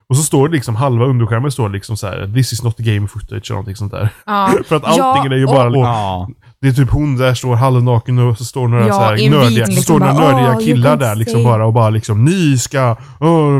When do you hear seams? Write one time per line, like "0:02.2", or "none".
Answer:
0:04.2
0:05.7
0:09.6